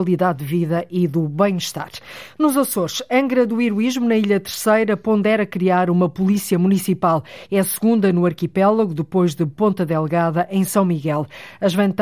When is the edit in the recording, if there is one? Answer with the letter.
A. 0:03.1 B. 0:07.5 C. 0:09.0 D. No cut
D